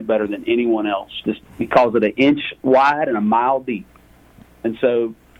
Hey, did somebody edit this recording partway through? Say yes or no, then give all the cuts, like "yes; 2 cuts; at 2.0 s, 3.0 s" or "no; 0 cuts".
no; 0 cuts